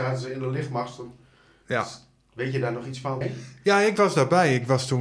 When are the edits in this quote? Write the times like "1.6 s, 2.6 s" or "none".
3.2 s